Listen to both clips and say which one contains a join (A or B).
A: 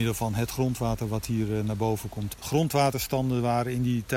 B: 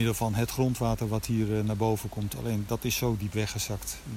A